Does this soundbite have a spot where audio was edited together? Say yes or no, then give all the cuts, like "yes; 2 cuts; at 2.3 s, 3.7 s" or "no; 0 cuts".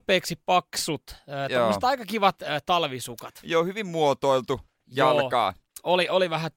no; 0 cuts